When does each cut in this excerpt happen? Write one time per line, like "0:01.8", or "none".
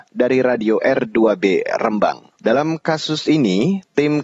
0:02.4

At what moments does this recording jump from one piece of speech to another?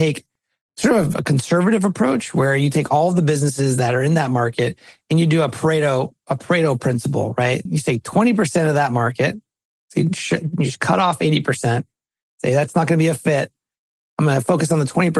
0:07.7

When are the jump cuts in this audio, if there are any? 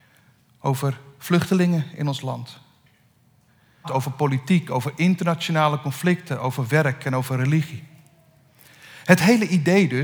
0:03.8

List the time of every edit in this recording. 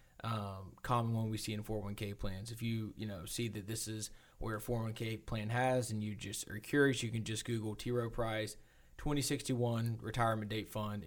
none

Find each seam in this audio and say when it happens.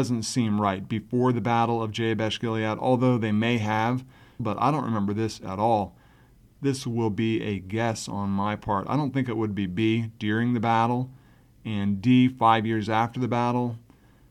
0:04.4

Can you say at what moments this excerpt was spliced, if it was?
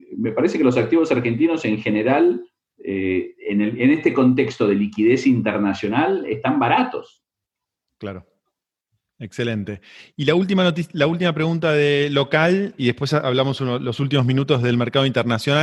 0:12.8

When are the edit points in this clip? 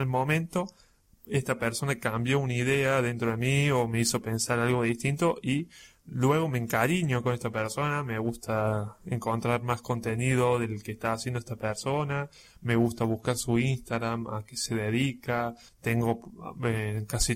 0:15.7

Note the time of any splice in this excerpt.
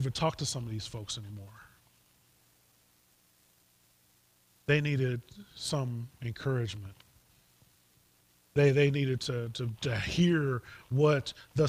0:09.8

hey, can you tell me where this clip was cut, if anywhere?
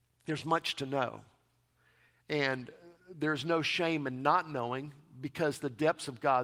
none

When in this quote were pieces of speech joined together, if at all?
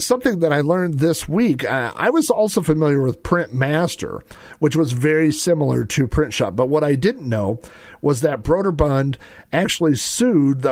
none

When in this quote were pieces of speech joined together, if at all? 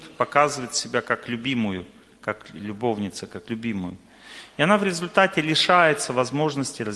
none

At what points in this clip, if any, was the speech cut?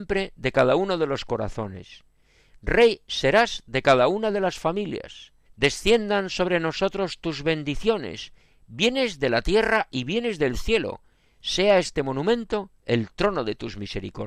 0:05.5

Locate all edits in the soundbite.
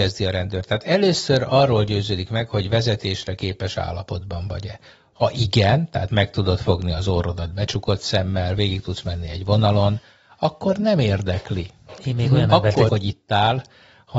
0:12.9

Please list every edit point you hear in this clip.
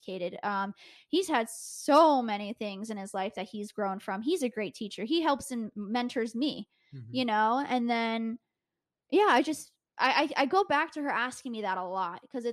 none

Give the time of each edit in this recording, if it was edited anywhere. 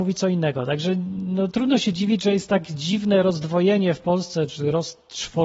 none

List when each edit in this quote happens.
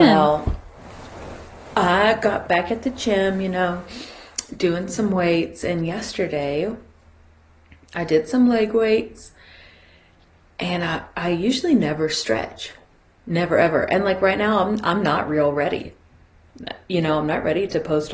0:02.5

